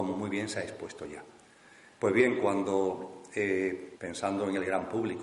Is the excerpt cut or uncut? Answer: cut